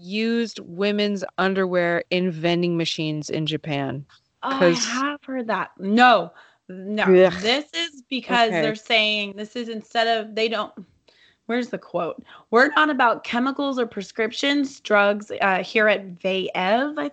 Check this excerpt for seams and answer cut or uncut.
uncut